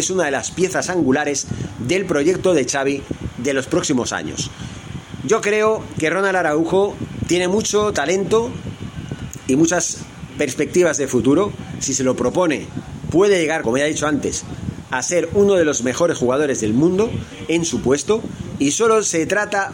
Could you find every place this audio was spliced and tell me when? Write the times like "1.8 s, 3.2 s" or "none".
13.6 s